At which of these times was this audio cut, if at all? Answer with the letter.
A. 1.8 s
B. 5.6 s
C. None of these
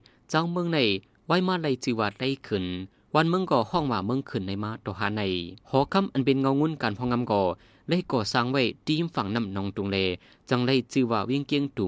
B